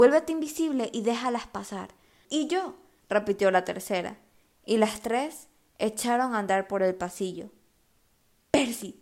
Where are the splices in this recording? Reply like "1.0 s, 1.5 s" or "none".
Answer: 2.2 s